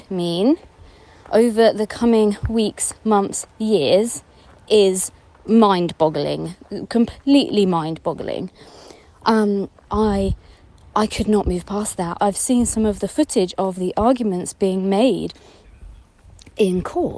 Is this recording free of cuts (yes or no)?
no